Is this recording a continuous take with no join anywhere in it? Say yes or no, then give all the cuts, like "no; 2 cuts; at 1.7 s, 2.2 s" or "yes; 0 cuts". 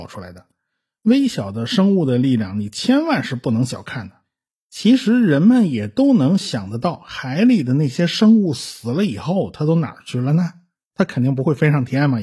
yes; 0 cuts